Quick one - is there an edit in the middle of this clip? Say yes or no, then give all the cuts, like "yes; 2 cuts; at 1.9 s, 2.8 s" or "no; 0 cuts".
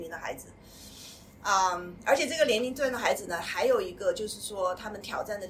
no; 0 cuts